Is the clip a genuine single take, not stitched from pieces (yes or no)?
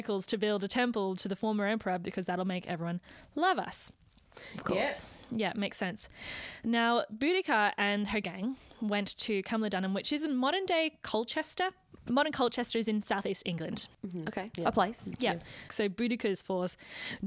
no